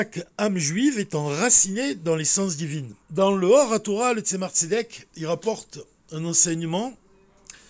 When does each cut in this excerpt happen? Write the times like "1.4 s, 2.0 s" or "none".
3.0 s